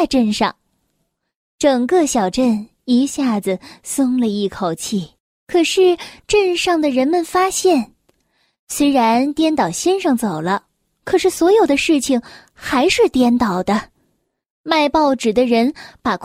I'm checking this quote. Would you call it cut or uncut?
uncut